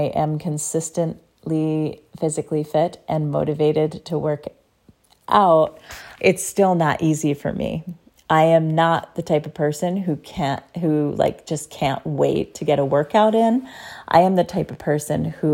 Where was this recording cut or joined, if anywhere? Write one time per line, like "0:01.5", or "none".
0:06.2